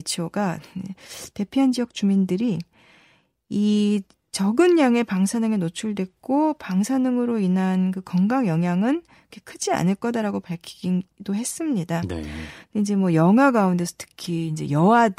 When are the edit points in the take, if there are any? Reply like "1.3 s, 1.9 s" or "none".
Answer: none